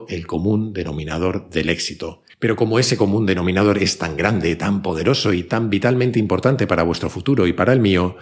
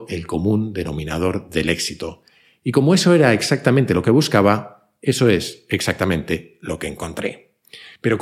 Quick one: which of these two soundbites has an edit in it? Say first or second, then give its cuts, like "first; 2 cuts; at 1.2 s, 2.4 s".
first; 1 cut; at 2.3 s